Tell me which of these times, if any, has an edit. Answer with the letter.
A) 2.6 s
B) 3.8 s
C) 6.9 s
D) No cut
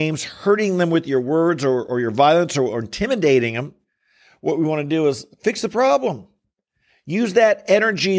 D